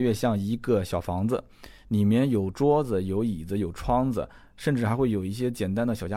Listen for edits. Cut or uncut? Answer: uncut